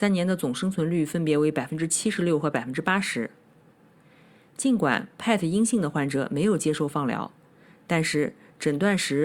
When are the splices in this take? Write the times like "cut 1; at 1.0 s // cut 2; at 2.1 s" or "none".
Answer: none